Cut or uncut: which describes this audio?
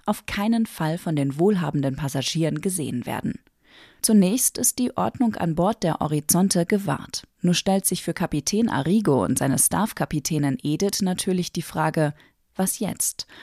uncut